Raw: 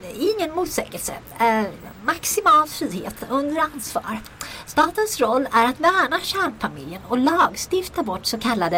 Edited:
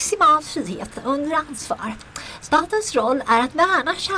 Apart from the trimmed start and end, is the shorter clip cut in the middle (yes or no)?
no